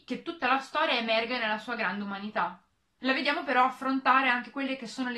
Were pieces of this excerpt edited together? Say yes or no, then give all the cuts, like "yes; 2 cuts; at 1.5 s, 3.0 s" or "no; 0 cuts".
yes; 1 cut; at 3.0 s